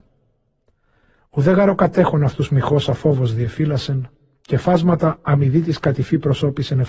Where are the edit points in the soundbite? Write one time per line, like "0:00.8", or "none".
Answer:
0:04.3